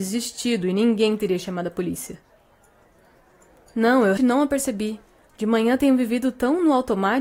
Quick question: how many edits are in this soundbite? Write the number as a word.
one